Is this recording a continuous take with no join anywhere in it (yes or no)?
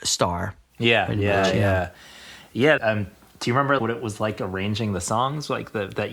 no